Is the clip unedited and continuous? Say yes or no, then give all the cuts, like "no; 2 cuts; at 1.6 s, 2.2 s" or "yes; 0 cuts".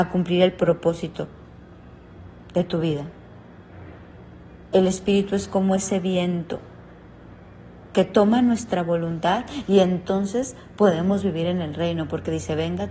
yes; 0 cuts